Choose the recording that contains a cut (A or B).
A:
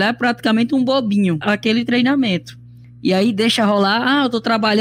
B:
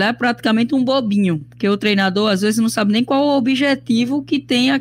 A